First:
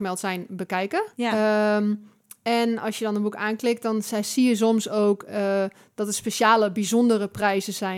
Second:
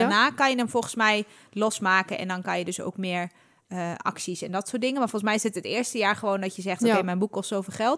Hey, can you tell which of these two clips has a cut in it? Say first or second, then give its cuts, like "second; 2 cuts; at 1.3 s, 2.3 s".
first; 1 cut; at 1.1 s